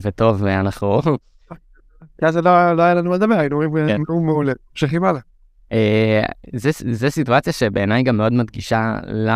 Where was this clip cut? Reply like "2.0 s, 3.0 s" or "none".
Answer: none